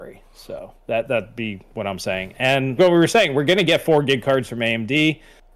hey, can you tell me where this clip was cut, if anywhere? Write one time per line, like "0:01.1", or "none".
0:02.8